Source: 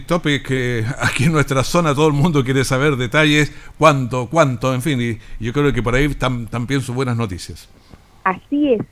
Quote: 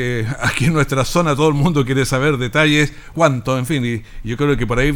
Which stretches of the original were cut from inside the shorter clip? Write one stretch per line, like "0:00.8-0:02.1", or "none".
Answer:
0:03.7-0:04.3